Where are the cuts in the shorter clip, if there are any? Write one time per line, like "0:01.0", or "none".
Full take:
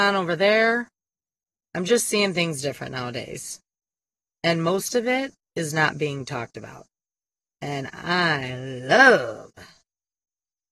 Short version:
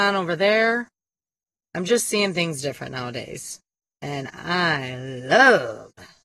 0:03.8